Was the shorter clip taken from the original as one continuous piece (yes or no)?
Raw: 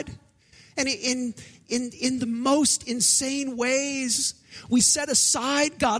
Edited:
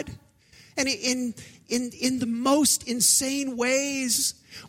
yes